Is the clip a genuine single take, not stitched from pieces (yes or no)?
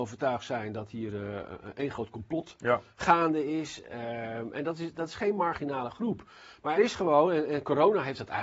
no